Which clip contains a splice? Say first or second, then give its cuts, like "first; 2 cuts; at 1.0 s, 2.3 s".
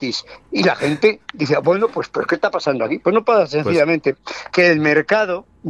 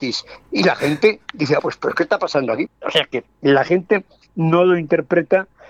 second; 2 cuts; at 1.6 s, 2.7 s